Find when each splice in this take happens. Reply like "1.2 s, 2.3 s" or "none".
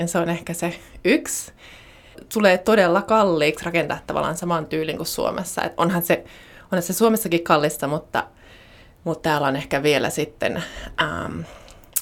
none